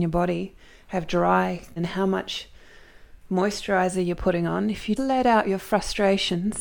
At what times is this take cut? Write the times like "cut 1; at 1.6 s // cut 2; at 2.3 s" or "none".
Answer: cut 1; at 1.8 s // cut 2; at 5.0 s